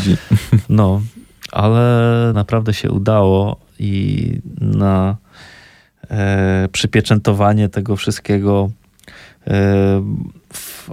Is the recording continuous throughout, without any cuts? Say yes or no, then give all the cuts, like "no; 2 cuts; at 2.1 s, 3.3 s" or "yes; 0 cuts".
no; 1 cut; at 2.3 s